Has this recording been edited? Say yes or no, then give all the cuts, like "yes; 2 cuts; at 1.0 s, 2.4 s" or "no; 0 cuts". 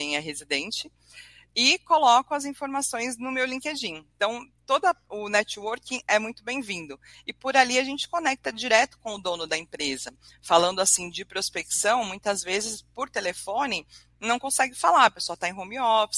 no; 0 cuts